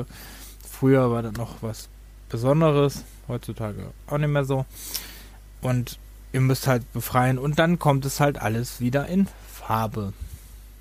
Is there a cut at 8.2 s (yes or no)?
no